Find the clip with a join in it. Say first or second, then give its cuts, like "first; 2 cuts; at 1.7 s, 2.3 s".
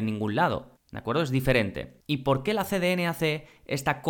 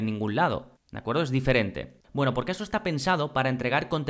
second; 1 cut; at 2.0 s